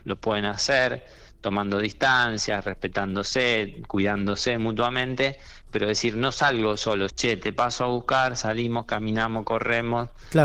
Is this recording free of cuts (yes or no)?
no